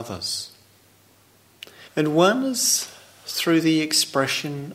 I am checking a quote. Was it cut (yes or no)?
yes